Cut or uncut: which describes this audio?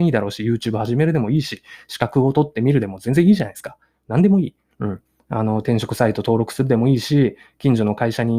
cut